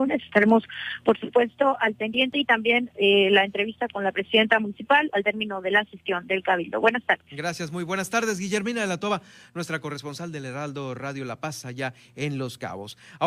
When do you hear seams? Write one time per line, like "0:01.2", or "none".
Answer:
none